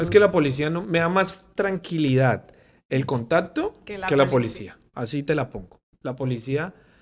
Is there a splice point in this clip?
no; 0 cuts

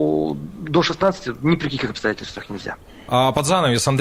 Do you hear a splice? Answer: yes; 1 cut; at 3.1 s

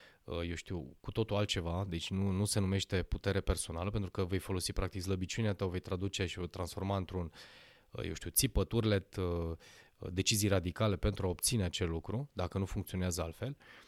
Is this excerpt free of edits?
yes; 0 cuts

